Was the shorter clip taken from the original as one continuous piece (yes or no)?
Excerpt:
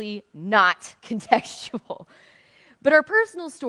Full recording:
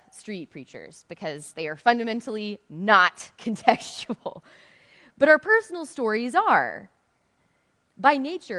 yes